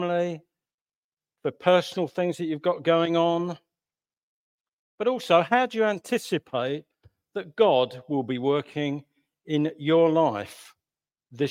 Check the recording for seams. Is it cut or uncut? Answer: uncut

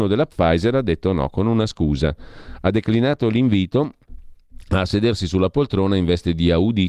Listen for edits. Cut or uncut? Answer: uncut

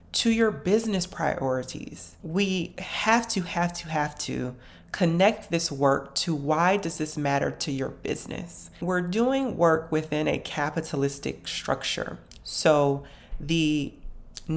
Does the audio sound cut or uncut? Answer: uncut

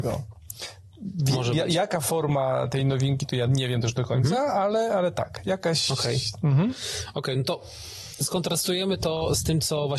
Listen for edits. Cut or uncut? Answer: uncut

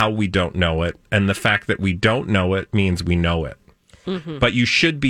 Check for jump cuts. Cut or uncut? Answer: cut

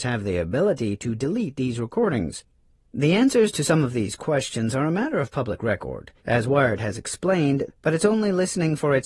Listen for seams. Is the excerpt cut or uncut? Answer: cut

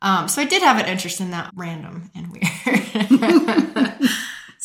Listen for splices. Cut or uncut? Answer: cut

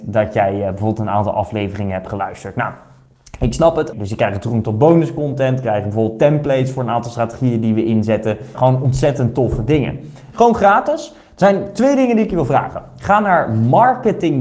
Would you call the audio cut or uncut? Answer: cut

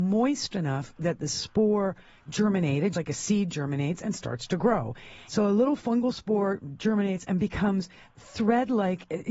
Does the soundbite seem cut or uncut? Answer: cut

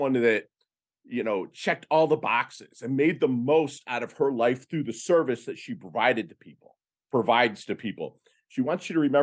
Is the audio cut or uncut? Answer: uncut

